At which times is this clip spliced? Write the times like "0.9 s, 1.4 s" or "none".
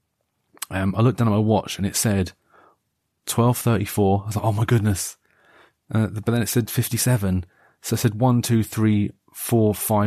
none